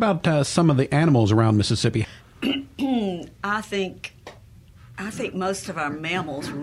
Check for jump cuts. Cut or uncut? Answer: cut